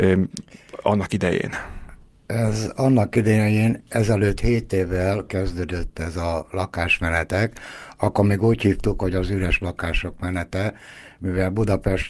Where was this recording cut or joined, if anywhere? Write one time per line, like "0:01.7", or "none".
none